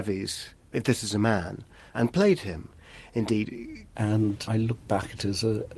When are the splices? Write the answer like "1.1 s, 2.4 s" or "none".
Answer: 3.9 s